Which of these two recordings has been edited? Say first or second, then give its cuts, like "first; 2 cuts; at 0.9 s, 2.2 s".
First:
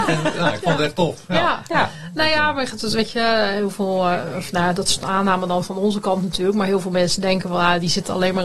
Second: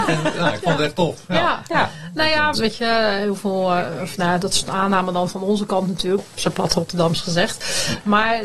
second; 2 cuts; at 2.5 s, 6.2 s